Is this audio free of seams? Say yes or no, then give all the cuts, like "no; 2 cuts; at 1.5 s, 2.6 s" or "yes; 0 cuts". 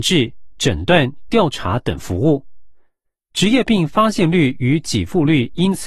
yes; 0 cuts